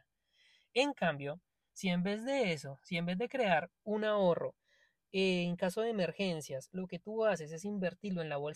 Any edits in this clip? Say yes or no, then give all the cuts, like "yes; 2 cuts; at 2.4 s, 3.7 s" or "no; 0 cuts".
no; 0 cuts